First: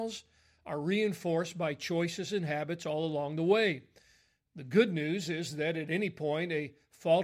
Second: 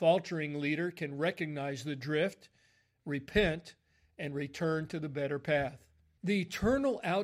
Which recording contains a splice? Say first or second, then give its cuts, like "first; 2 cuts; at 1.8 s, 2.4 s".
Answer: second; 1 cut; at 6.2 s